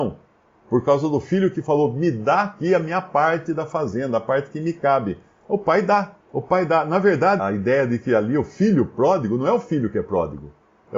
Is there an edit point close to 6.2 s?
yes; 2 cuts; at 6.2 s, 7.4 s

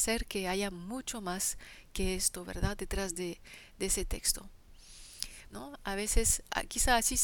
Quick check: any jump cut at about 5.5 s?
yes; 1 cut; at 5.5 s

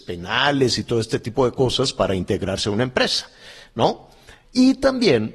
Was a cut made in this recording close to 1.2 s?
no; 1 cut; at 4.4 s

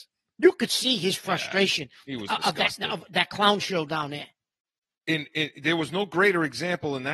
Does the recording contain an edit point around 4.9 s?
yes; 1 cut; at 4.9 s

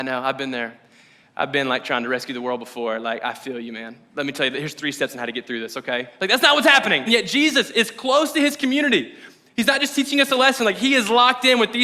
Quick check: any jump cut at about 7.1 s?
yes; 1 cut; at 7.1 s

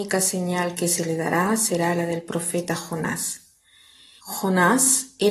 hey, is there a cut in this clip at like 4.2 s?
yes; 1 cut; at 4.2 s

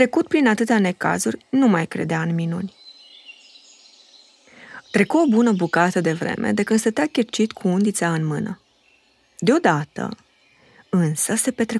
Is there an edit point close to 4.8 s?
yes; 1 cut; at 4.8 s

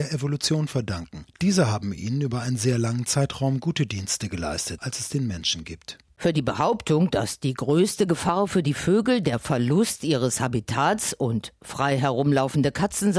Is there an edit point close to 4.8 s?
yes; 1 cut; at 4.8 s

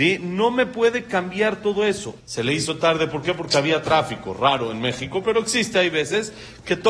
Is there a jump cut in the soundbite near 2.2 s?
yes; 1 cut; at 2.2 s

